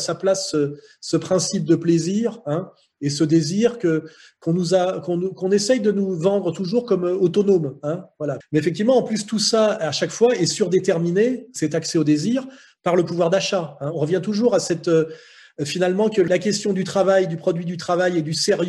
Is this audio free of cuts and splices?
no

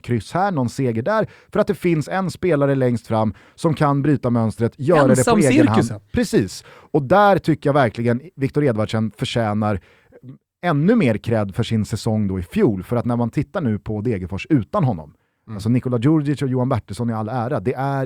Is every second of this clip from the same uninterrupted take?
yes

